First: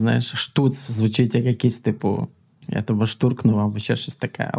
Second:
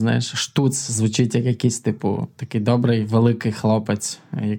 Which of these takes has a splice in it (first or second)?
second